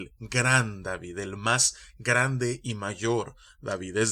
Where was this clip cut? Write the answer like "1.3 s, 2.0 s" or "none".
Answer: none